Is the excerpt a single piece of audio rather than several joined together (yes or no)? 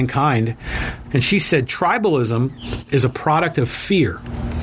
no